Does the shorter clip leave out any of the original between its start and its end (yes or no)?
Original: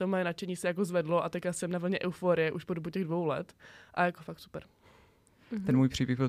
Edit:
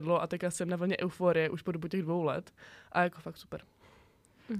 no